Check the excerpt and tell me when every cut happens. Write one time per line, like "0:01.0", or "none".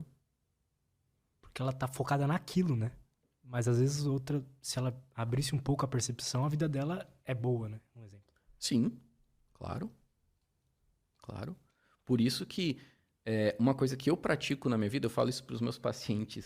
0:01.3